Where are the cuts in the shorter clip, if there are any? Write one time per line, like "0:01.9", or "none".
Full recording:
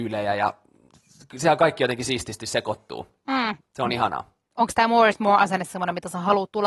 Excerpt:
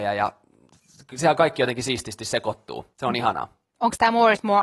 0:02.9